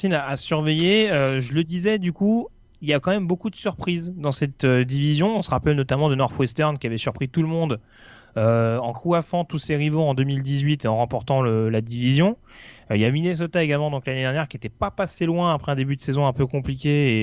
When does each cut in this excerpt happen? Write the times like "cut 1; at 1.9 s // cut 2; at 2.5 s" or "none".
none

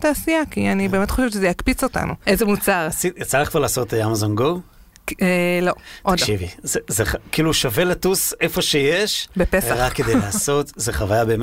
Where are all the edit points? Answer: cut 1; at 2.2 s

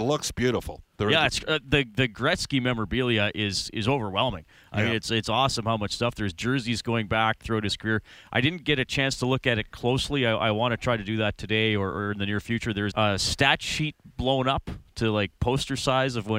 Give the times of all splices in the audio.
cut 1; at 12.9 s

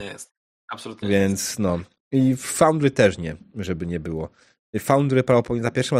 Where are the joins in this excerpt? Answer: none

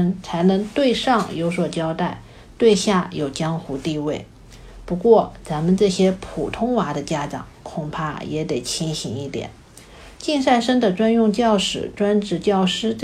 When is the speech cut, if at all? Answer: none

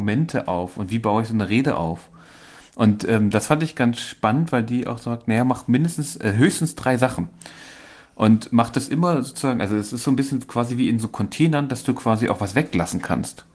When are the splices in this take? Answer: none

